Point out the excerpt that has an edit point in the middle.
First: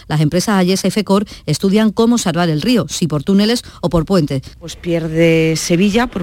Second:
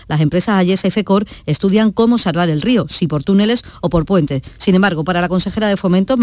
first; 1 cut; at 4.5 s

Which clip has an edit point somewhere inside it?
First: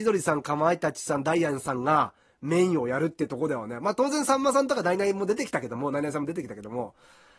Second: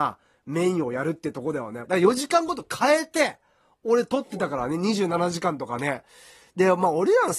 second; 1 cut; at 1.8 s

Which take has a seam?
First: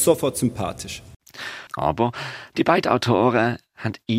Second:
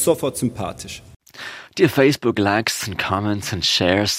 first; 1 cut; at 1.7 s

